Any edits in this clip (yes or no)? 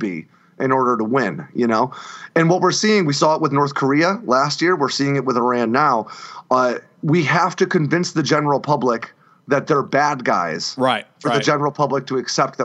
no